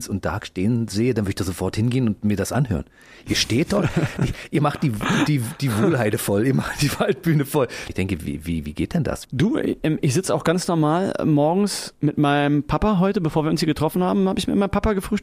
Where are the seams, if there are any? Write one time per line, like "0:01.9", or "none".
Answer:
0:07.9
0:09.3